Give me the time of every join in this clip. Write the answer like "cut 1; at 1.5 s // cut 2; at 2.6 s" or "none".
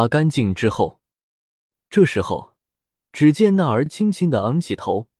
none